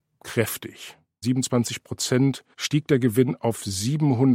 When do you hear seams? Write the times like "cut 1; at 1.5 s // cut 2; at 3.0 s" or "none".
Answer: cut 1; at 1.2 s // cut 2; at 2.5 s